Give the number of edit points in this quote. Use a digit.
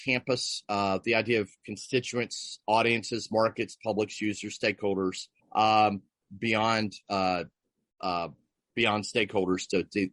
2